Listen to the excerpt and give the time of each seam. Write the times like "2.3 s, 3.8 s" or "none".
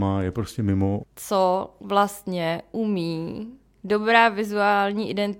1.0 s